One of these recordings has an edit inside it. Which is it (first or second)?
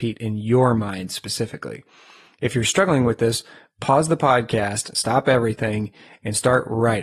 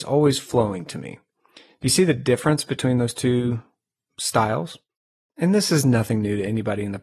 second